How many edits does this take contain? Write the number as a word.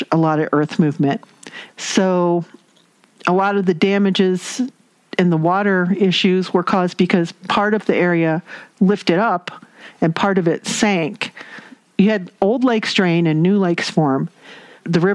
one